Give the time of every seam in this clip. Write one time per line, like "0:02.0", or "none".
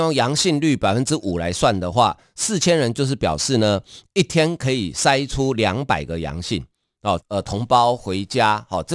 0:07.2